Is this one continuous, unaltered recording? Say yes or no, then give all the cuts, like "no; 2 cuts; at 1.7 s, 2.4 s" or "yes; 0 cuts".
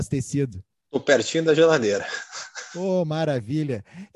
yes; 0 cuts